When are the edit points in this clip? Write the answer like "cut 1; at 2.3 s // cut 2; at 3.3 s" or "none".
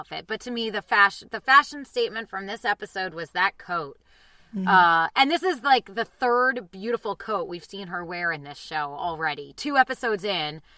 none